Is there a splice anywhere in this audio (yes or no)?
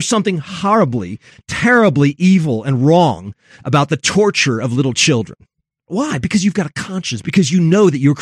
yes